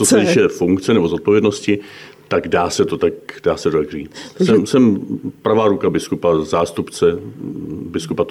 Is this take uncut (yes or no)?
yes